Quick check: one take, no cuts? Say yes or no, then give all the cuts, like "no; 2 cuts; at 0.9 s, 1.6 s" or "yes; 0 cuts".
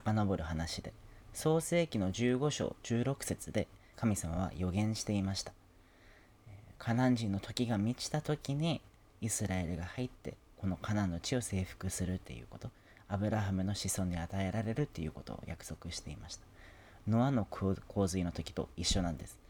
no; 1 cut; at 3.9 s